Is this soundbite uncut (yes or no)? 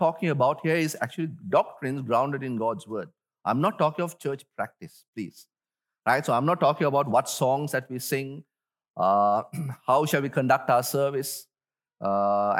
yes